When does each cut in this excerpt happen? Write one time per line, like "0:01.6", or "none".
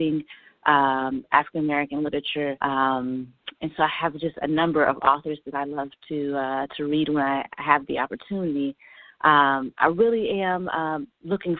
none

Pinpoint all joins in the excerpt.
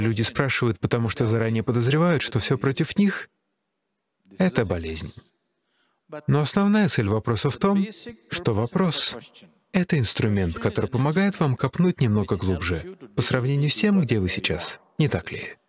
none

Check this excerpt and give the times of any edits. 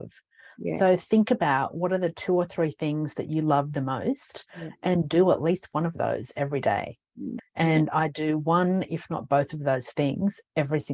0:07.4

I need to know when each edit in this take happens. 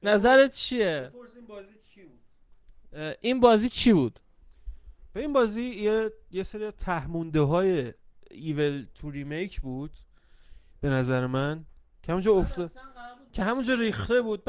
none

